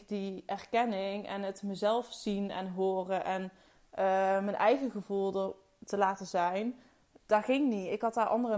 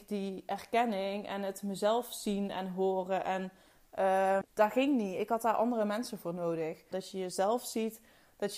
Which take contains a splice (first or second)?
second